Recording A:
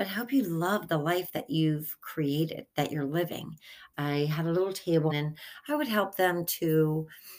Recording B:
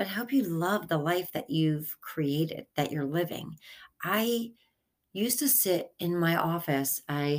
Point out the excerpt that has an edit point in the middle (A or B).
A